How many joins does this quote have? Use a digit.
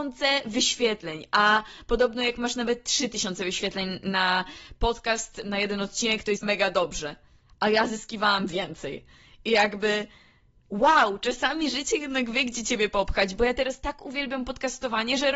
1